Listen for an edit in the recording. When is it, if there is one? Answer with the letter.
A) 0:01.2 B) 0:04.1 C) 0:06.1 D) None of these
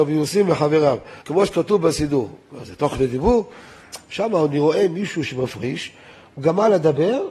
A